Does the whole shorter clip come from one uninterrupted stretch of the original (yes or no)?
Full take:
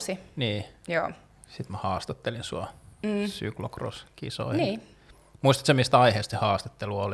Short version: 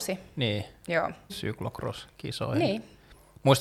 no